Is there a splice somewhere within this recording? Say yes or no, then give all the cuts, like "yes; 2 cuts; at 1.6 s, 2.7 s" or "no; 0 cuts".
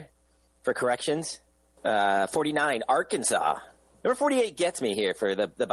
yes; 2 cuts; at 1.8 s, 4.0 s